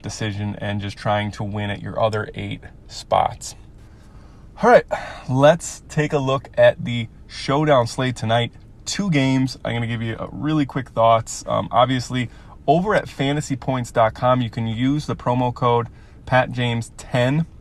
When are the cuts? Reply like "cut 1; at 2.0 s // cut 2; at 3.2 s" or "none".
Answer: none